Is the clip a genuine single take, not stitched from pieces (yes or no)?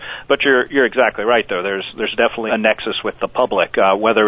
no